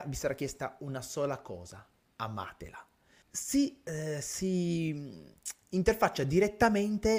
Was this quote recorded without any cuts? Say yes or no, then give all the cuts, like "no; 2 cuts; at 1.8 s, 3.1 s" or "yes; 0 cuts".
no; 1 cut; at 3.2 s